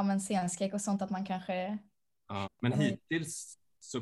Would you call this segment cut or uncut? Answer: cut